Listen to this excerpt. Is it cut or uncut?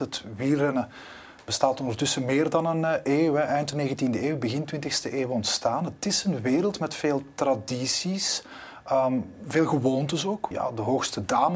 cut